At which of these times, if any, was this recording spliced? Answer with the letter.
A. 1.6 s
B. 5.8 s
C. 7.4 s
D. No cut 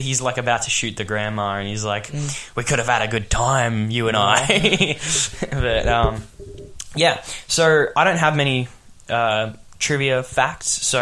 D